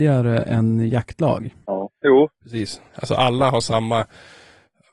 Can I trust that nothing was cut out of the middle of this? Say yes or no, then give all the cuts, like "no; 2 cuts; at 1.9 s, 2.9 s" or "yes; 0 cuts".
no; 2 cuts; at 1.6 s, 2.9 s